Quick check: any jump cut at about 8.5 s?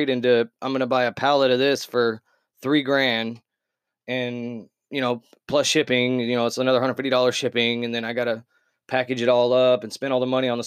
no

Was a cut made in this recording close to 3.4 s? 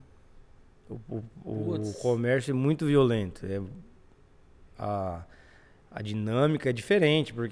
no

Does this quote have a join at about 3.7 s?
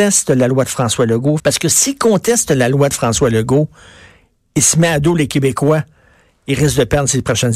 no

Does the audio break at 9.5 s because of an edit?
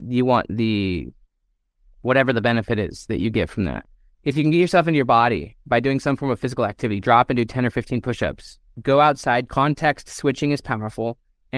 yes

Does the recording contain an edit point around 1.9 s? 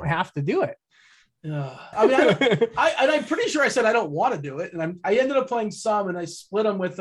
yes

